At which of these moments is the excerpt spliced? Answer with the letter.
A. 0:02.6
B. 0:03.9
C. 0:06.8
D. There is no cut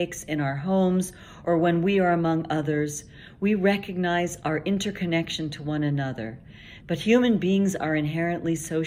C